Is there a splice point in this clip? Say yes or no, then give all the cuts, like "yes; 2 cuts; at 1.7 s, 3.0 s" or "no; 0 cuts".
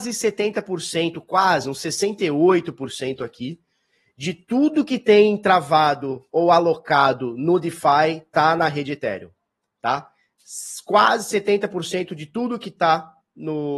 no; 0 cuts